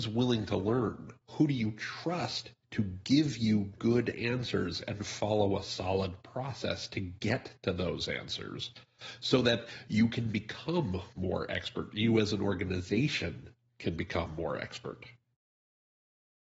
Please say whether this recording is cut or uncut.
cut